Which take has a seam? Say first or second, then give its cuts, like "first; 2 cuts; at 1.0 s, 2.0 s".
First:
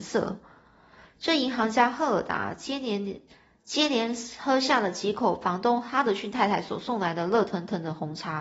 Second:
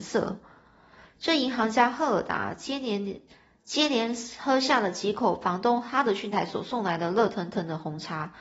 second; 1 cut; at 6.3 s